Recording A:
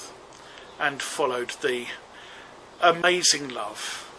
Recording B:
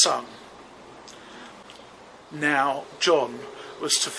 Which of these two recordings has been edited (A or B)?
B